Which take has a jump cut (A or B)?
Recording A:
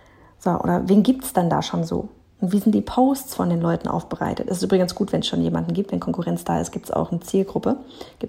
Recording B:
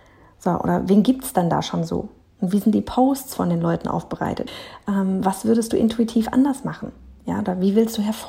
B